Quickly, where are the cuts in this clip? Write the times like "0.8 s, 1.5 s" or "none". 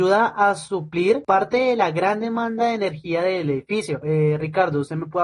4.0 s

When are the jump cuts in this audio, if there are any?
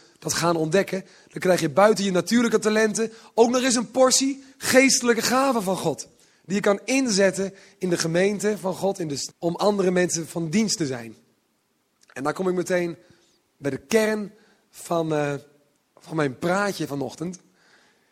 9.3 s

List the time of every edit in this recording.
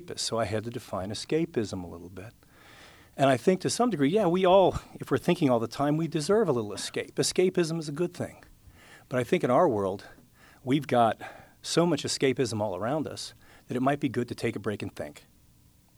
none

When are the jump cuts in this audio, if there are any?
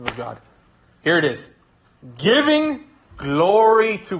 1.0 s

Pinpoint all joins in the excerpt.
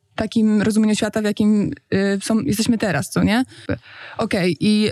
3.7 s

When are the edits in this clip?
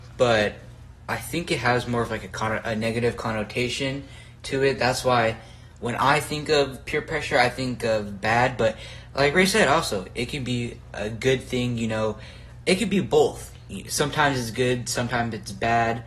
none

